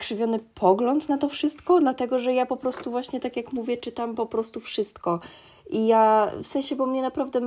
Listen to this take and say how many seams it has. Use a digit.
0